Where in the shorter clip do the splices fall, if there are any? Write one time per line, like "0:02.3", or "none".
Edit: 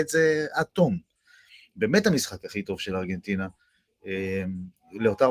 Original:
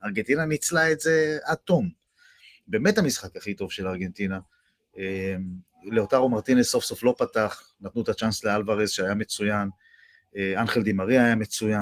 none